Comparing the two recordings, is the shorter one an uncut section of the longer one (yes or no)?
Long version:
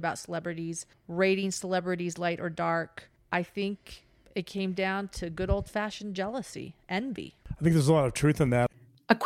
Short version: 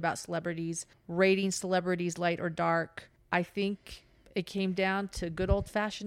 yes